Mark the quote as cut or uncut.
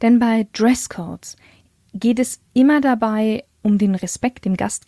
uncut